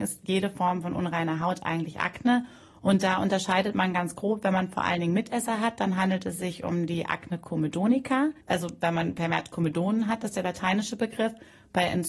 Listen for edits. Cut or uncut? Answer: cut